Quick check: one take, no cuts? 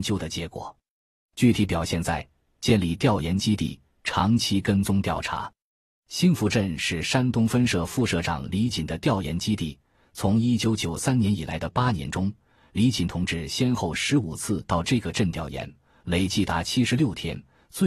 yes; 0 cuts

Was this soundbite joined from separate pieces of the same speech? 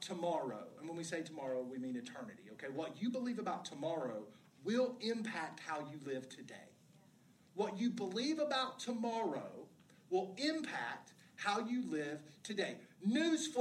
no; 0 cuts

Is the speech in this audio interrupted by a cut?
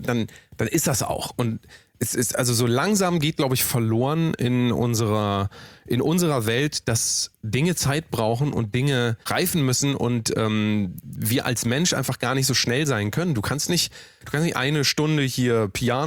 yes; 1 cut; at 9.2 s

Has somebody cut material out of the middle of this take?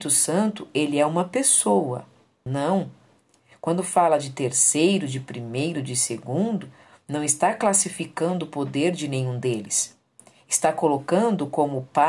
yes; 1 cut; at 2.5 s

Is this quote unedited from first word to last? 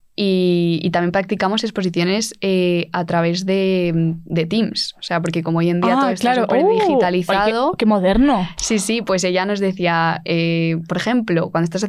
yes; 0 cuts

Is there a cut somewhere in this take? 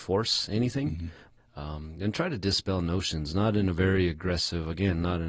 yes; 1 cut; at 1.4 s

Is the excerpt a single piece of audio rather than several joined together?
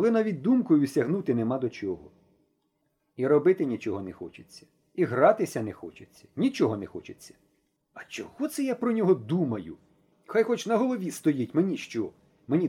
no; 2 cuts; at 4.8 s, 7.8 s

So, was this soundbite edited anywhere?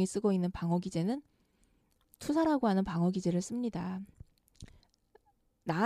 no; 0 cuts

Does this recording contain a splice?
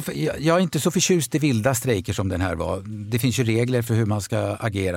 no; 0 cuts

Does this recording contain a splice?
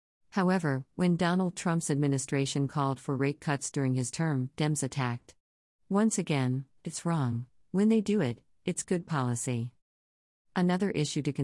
yes; 1 cut; at 6.8 s

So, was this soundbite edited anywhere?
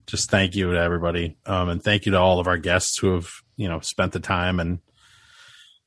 no; 0 cuts

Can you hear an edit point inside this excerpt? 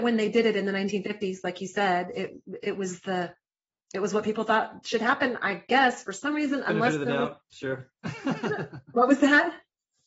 no; 0 cuts

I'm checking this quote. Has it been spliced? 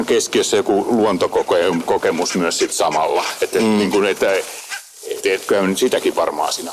yes; 1 cut; at 5.2 s

